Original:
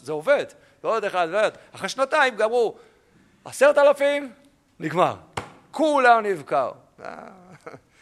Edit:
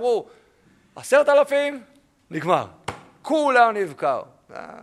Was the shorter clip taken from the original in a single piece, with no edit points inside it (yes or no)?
yes